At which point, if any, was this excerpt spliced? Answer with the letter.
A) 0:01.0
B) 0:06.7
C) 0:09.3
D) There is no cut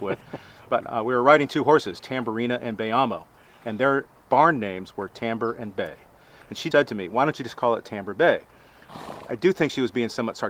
B